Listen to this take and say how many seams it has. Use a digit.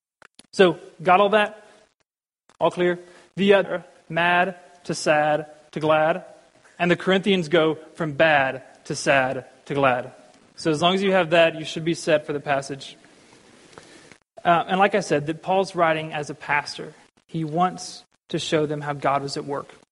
1